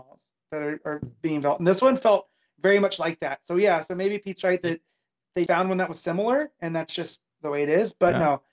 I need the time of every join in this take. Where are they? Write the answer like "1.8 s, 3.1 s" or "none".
5.5 s

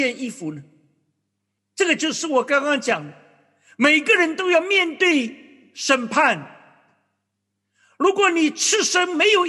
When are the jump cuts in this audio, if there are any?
1.6 s

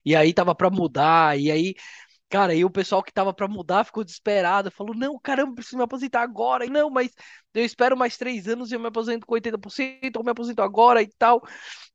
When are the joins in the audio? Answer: 6.7 s

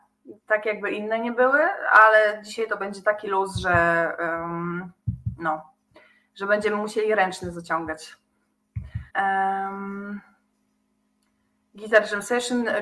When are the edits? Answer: 9.1 s

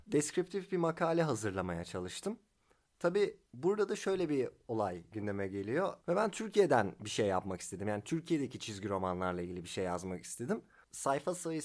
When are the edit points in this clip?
3.5 s, 6.0 s

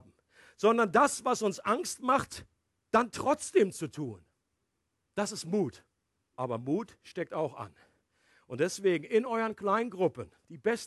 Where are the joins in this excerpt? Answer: 6.3 s

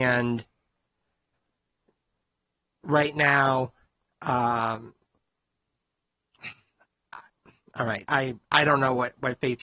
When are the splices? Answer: 8.1 s

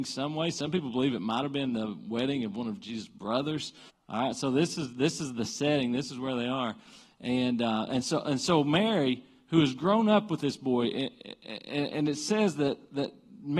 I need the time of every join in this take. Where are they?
3.9 s

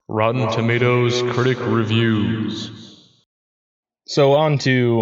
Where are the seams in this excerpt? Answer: none

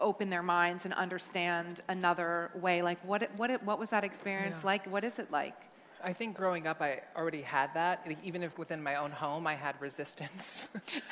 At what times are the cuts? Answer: none

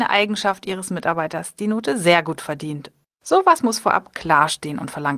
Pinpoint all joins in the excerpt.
3.0 s

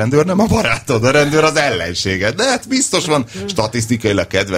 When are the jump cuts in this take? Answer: none

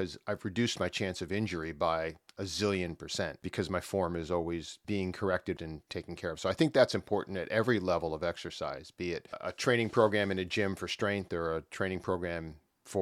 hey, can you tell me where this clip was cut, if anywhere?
5.6 s

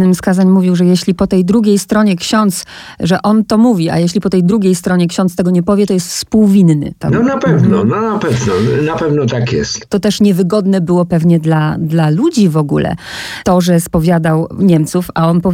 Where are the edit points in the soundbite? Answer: none

